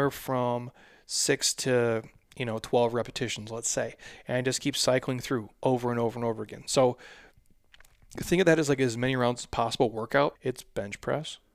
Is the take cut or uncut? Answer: cut